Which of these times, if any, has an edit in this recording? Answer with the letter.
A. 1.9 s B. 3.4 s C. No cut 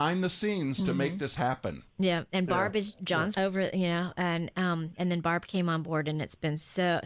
B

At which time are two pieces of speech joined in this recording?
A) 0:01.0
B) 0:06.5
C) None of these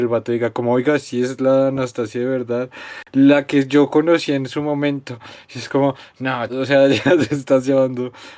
B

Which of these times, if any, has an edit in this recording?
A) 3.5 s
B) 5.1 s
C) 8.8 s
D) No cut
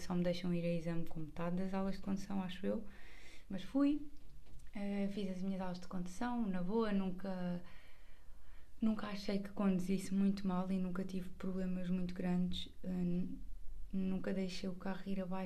A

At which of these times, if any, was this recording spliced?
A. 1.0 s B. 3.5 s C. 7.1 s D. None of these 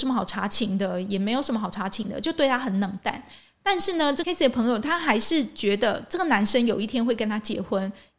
D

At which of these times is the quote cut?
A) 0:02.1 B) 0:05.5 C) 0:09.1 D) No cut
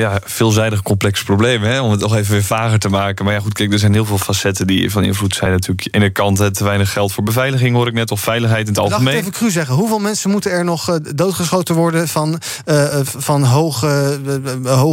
D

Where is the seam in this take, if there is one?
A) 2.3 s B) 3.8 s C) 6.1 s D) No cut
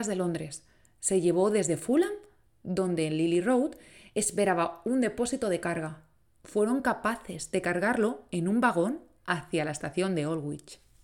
D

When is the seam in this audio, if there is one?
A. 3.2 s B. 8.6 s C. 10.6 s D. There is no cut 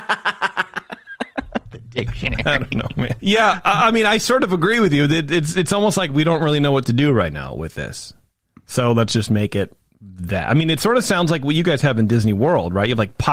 A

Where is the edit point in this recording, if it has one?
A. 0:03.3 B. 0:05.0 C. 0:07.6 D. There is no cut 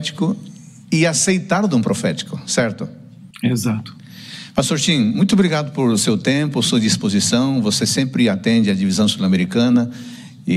A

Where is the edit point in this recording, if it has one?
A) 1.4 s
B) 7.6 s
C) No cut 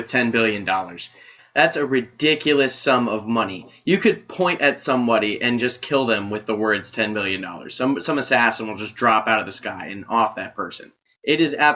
A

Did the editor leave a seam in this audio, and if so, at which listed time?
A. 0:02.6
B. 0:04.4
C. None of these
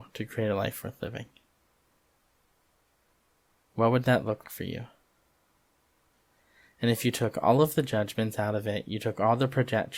B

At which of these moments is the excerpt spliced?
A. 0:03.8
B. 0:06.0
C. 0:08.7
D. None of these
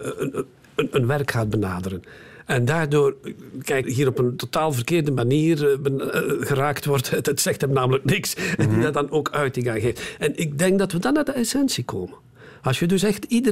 A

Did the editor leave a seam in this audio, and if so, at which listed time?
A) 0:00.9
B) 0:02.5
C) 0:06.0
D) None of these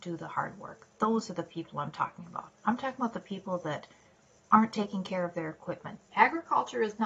C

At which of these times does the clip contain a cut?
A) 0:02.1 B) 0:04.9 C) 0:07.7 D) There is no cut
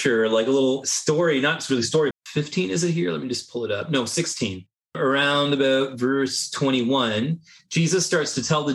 A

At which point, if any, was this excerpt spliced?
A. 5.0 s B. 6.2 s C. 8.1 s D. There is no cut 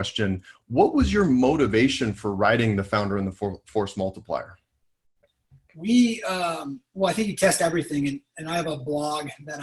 D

